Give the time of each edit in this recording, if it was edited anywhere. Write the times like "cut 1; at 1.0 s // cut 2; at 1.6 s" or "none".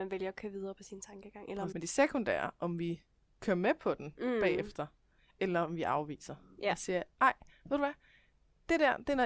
cut 1; at 1.7 s